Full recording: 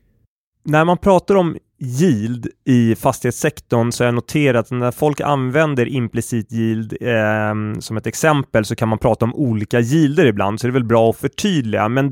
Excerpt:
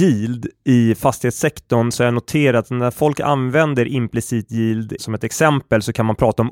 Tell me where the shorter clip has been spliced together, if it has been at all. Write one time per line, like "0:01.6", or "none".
0:05.0